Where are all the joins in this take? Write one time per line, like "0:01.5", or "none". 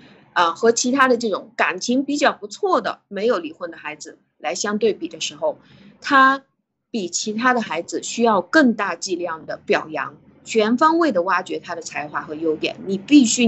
none